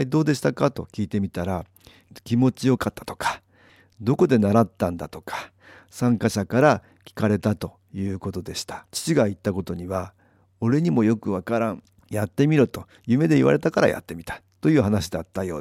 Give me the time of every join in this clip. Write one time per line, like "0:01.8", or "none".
0:08.9

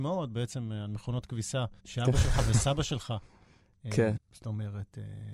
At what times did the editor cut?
0:01.8
0:04.2

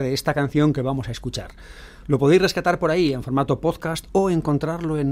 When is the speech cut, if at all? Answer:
0:02.0

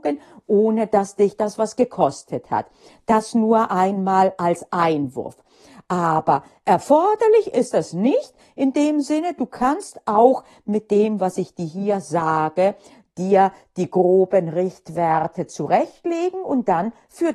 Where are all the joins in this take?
none

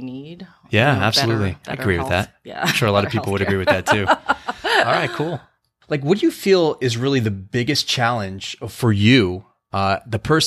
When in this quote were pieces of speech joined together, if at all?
none

